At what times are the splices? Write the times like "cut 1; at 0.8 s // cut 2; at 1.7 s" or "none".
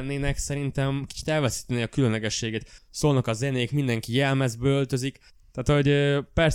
cut 1; at 2.8 s

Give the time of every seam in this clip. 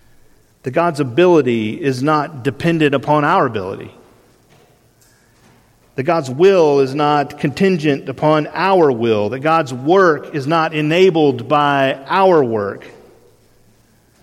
none

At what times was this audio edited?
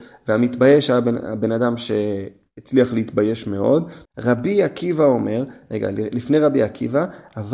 cut 1; at 4.1 s

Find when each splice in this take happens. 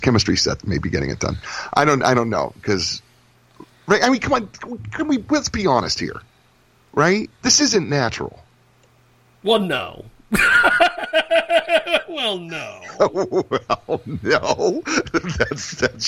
cut 1; at 7.3 s

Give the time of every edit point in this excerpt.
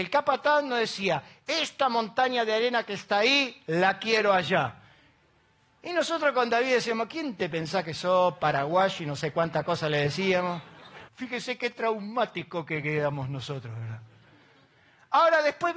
cut 1; at 11.1 s

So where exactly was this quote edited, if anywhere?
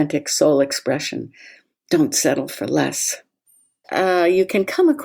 cut 1; at 3.8 s

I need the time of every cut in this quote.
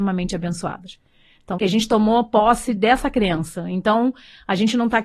cut 1; at 1.5 s

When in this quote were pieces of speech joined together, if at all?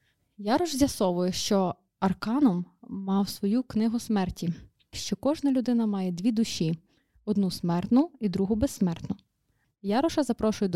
cut 1; at 4.9 s // cut 2; at 9.6 s

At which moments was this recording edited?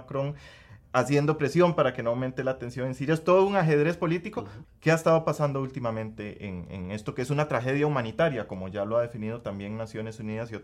cut 1; at 4.6 s

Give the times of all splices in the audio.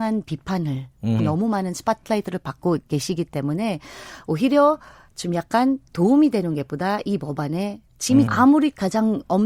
cut 1; at 1.2 s // cut 2; at 8.3 s

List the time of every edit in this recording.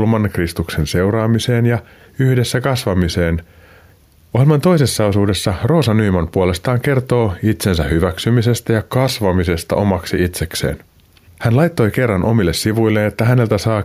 none

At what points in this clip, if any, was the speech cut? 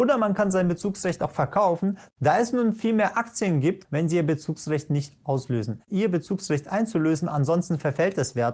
cut 1; at 2.1 s // cut 2; at 3.8 s // cut 3; at 5.9 s

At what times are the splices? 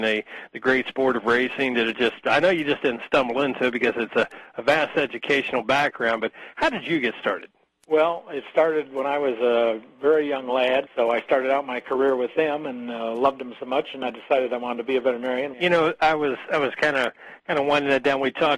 cut 1; at 10.9 s // cut 2; at 15.5 s

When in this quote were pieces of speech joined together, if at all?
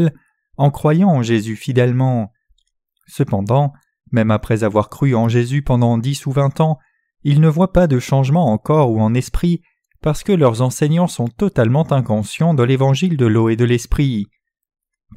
none

